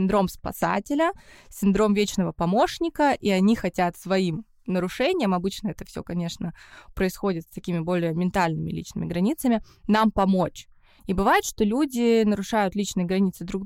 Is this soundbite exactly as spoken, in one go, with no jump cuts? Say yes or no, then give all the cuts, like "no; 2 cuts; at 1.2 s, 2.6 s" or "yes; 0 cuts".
no; 2 cuts; at 3.9 s, 11.0 s